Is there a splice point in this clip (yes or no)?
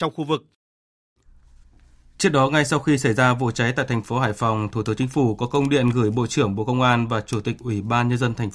no